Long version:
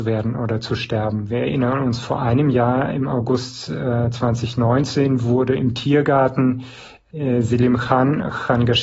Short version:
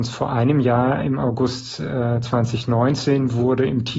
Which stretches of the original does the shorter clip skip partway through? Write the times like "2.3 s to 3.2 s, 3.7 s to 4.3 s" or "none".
none